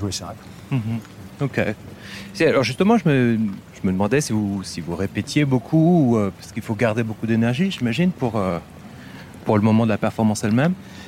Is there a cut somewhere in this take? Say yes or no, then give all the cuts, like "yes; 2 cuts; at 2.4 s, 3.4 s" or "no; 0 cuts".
no; 0 cuts